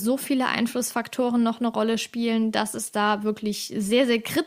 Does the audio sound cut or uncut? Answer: uncut